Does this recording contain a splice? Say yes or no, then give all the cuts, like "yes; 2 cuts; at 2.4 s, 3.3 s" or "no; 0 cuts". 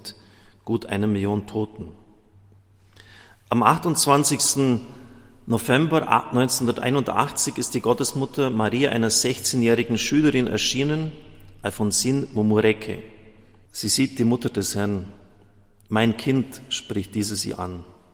yes; 1 cut; at 13.7 s